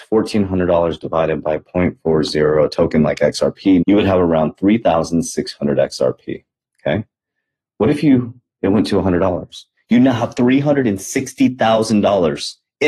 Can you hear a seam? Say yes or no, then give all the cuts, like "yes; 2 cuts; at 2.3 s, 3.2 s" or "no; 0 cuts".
yes; 1 cut; at 3.8 s